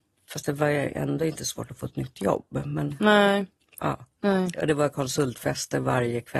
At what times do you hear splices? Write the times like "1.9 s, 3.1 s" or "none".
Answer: 4.1 s